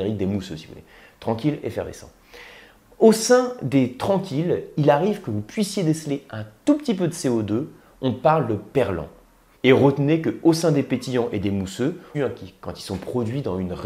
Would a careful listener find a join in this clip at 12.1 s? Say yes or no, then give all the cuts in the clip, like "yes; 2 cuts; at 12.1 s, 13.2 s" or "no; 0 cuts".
yes; 2 cuts; at 9.5 s, 12.1 s